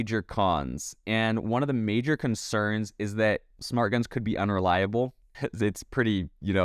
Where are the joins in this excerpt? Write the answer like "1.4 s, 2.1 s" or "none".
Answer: 5.3 s